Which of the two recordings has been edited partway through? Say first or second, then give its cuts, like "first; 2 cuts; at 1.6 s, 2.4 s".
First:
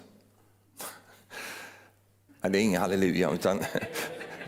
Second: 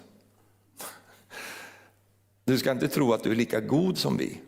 first; 1 cut; at 2.3 s